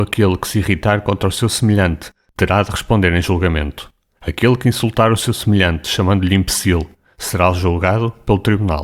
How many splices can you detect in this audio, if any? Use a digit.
0